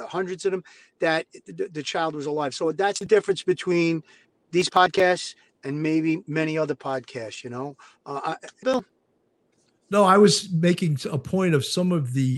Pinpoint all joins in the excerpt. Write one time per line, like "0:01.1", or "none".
0:08.6